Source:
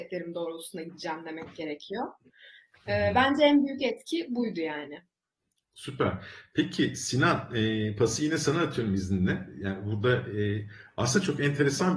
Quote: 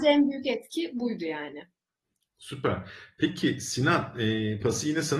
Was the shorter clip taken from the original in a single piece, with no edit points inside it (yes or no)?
yes